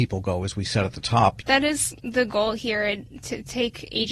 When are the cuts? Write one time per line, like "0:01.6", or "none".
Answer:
0:01.4